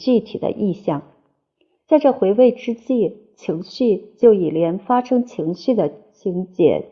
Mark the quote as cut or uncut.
cut